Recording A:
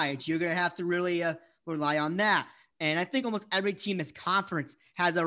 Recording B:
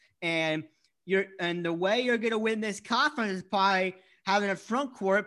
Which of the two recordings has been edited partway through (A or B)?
A